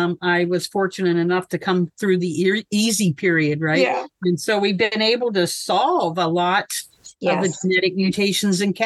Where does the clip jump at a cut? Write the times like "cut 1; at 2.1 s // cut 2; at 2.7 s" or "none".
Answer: none